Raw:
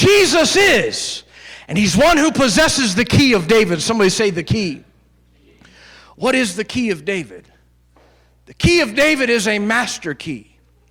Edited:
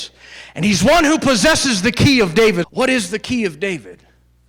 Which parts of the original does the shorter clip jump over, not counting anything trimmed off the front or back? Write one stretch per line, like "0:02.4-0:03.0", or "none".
0:03.8-0:06.1

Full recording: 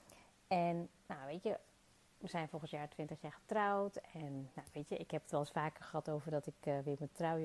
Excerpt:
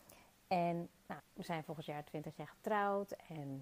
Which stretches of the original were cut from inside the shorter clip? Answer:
0:01.2-0:02.0

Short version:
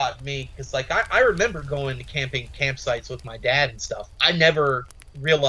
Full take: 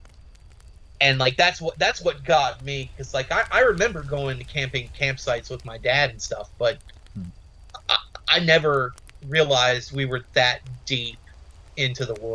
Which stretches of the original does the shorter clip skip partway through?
0:06.5-0:08.2

